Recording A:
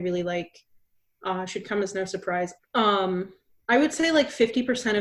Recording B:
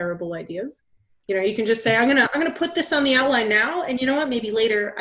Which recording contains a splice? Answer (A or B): A